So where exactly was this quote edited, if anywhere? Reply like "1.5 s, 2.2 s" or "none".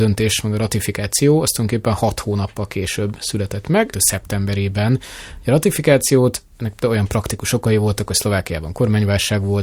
3.9 s